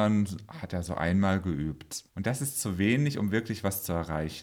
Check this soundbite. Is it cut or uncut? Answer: cut